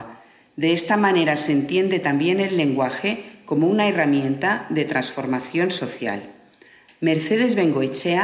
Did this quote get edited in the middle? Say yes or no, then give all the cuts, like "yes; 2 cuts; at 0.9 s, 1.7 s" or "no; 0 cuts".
yes; 1 cut; at 6.9 s